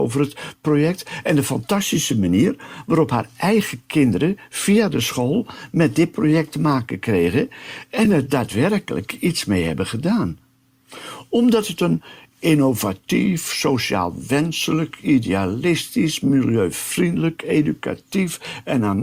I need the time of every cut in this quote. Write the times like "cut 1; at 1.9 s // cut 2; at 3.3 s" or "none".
none